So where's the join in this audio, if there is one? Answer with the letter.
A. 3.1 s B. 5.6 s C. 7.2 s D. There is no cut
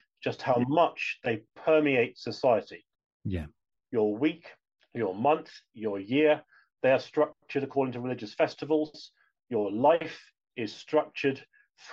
D